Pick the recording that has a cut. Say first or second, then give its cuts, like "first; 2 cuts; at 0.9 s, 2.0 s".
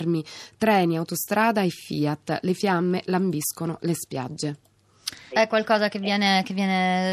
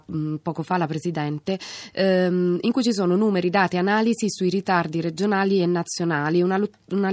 first; 1 cut; at 5.3 s